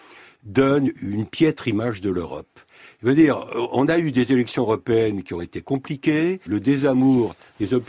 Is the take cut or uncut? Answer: cut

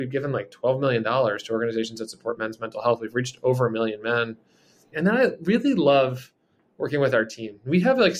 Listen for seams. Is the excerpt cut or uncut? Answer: cut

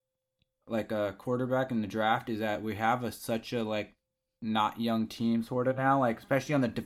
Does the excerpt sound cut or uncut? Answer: uncut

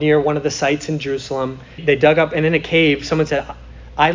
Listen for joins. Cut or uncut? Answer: cut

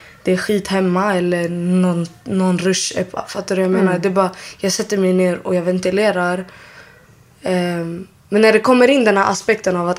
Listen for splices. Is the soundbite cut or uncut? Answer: cut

